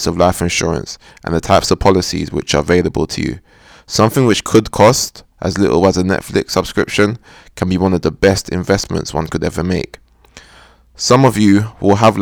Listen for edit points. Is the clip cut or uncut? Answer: uncut